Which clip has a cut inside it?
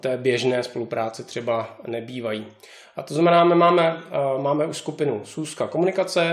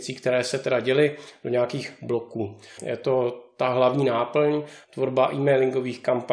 second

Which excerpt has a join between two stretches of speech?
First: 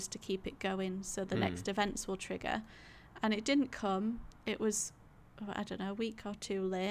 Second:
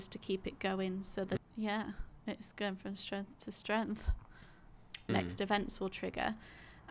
second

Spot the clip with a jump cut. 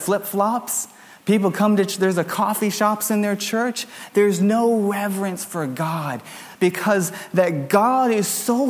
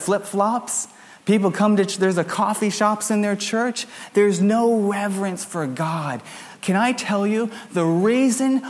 first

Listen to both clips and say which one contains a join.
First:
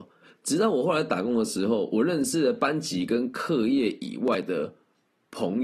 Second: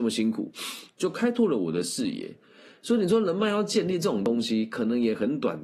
second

